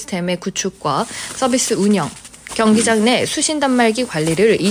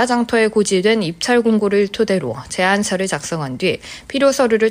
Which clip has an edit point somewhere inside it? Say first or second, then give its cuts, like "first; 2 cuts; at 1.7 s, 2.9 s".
first; 1 cut; at 2.5 s